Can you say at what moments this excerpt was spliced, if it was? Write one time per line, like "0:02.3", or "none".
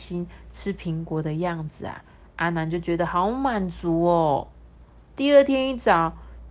none

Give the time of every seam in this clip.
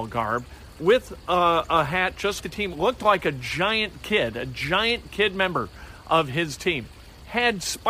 0:02.4

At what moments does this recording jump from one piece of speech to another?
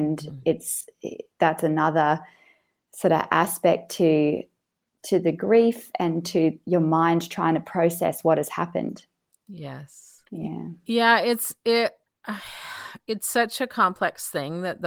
0:10.3

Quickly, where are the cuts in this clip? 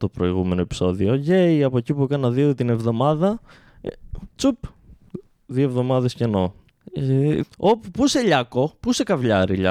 0:07.4

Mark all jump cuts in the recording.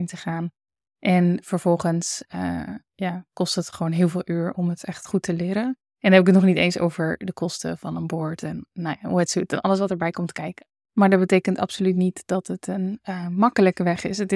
0:10.9

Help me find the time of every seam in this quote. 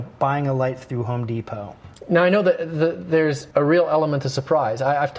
0:03.5

